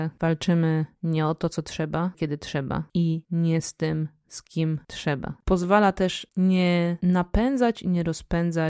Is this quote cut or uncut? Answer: cut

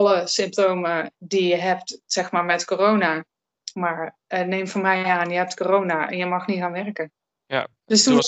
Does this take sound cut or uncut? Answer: cut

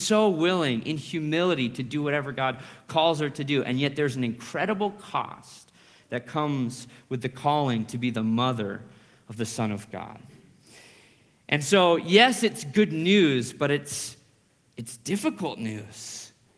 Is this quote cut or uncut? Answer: uncut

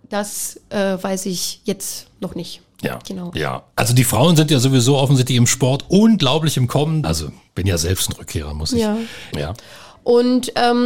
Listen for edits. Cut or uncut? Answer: cut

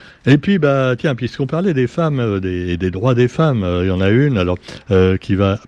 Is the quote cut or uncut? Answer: uncut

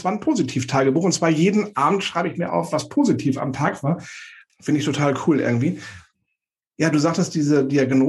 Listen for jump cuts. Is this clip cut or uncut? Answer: uncut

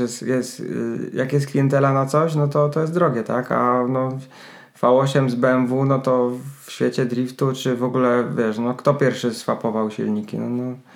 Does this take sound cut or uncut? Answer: uncut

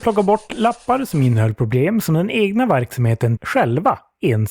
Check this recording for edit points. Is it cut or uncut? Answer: cut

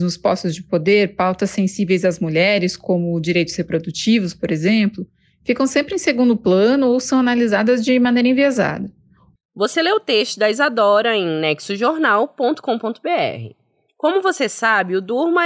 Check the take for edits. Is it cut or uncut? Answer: cut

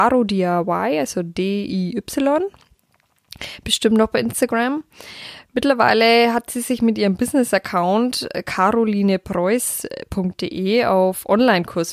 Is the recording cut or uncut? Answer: uncut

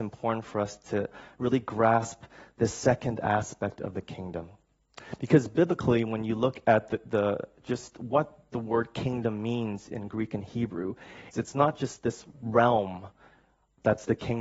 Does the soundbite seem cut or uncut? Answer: cut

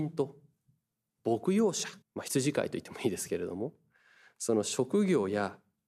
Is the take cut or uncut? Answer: cut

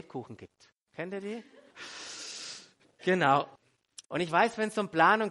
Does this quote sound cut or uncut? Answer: cut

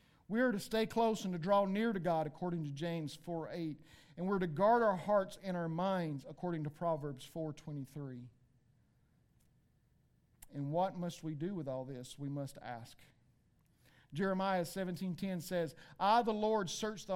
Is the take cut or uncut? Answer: uncut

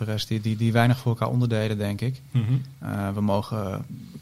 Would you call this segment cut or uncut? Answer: uncut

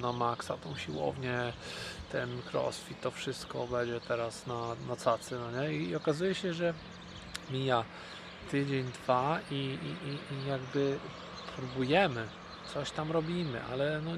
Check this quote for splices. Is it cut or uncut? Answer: uncut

